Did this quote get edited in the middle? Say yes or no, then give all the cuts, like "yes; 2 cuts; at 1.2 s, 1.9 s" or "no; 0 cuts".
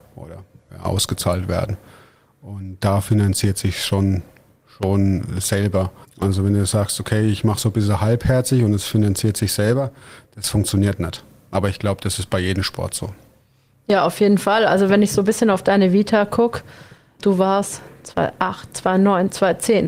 yes; 1 cut; at 6.0 s